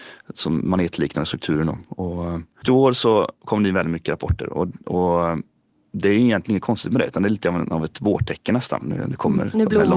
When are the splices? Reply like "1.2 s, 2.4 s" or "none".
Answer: 2.6 s, 8.8 s